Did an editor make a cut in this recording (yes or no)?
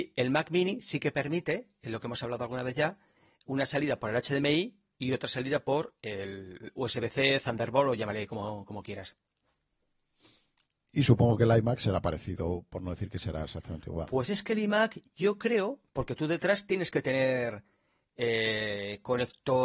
no